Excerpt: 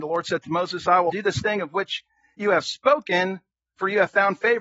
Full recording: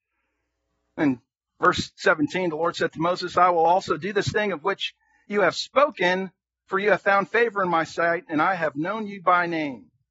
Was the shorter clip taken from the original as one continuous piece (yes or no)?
no